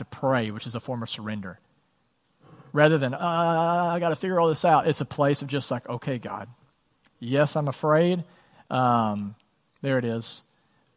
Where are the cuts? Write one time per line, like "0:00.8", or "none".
0:08.6